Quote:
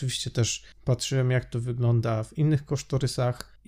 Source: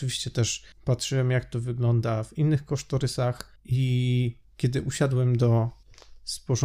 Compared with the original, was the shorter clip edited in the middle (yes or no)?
no